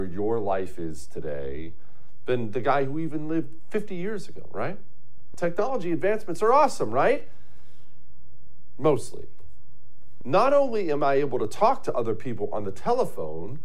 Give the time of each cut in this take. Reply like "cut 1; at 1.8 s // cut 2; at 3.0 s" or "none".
cut 1; at 5.3 s // cut 2; at 10.2 s